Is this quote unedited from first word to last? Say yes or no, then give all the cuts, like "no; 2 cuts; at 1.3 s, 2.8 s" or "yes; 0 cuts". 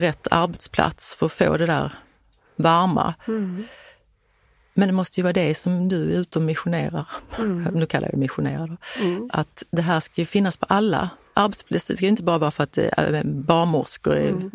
yes; 0 cuts